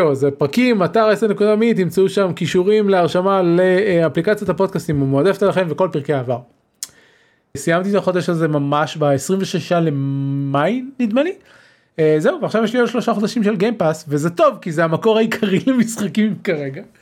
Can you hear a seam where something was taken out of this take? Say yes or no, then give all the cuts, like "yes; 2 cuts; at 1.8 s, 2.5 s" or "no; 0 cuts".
yes; 1 cut; at 7.5 s